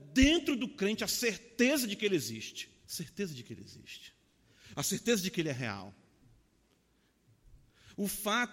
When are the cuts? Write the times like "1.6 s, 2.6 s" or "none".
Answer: 2.8 s